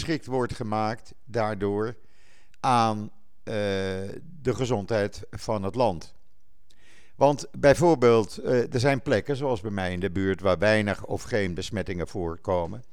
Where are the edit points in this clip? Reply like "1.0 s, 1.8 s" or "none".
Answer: none

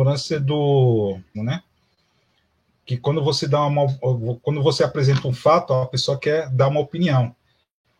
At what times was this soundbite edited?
1.3 s

